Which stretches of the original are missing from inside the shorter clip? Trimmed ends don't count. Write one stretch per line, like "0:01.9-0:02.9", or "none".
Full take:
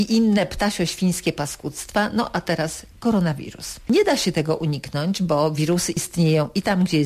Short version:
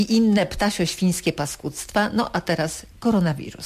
none